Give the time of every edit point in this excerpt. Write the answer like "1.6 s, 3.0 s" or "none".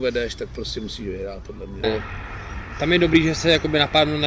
1.8 s